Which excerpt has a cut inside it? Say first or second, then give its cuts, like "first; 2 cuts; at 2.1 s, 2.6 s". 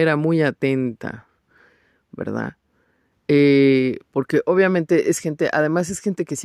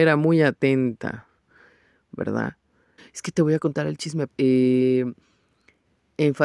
second; 2 cuts; at 3.0 s, 4.3 s